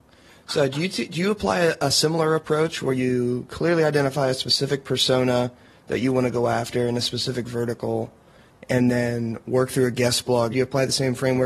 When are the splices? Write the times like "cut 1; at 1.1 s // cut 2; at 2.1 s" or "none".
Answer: cut 1; at 10.5 s